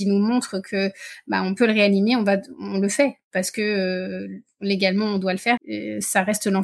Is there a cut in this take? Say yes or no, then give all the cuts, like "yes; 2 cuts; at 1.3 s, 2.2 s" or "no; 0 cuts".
yes; 1 cut; at 5.6 s